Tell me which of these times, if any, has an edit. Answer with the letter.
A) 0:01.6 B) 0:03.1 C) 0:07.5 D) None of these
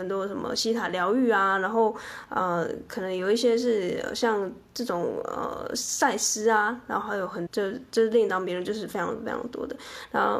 C